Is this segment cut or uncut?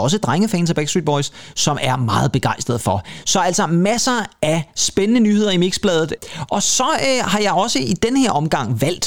uncut